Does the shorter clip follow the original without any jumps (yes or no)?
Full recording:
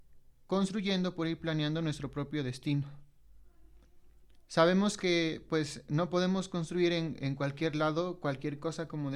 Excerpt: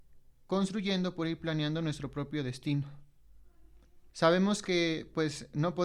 no